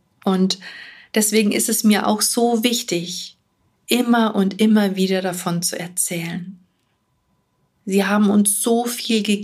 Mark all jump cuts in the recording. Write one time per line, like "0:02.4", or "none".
0:07.7